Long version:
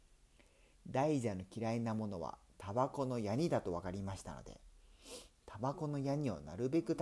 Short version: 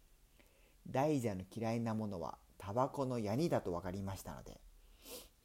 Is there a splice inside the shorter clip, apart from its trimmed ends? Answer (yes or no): no